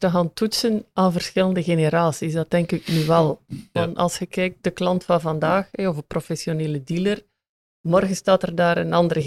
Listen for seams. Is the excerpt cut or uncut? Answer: uncut